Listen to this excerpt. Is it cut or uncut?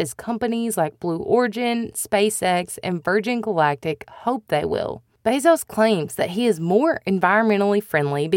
uncut